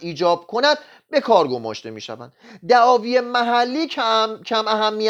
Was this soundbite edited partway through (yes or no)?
no